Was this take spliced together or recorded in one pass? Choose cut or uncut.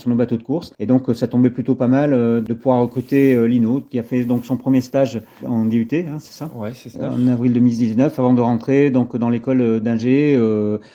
uncut